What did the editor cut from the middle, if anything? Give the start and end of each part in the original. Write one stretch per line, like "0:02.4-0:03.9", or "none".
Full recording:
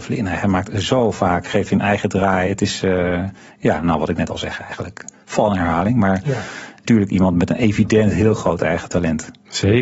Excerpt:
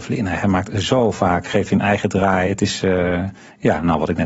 none